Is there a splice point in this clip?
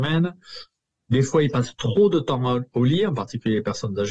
no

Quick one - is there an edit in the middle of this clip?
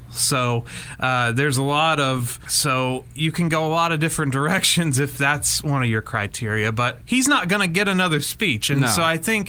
yes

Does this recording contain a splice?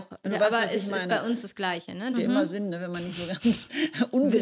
yes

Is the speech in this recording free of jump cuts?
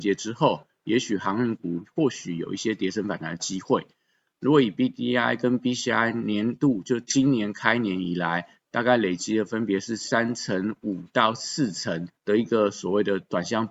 no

